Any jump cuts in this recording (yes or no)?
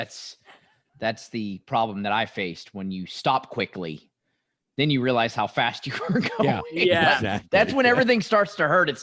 no